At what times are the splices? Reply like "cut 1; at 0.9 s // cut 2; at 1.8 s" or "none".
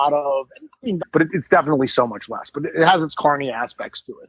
cut 1; at 1.0 s